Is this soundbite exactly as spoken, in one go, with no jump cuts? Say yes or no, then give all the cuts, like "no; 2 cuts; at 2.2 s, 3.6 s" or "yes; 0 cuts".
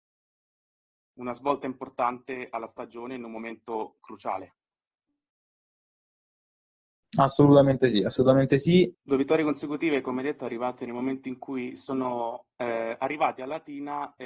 no; 1 cut; at 8.9 s